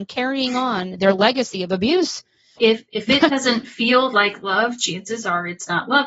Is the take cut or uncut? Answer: cut